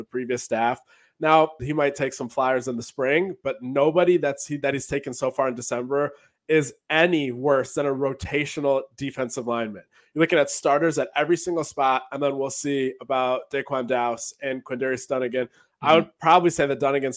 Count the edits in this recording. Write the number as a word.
one